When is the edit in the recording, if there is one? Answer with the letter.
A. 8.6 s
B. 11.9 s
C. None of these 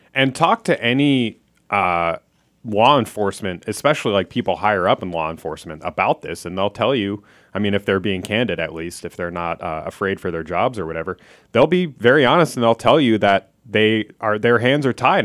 C